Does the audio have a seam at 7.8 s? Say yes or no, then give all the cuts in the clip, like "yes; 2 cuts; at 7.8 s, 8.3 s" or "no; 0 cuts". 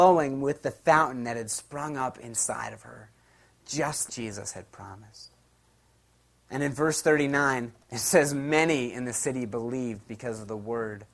yes; 2 cuts; at 4.1 s, 7.8 s